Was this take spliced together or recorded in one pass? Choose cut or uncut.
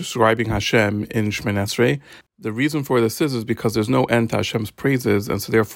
cut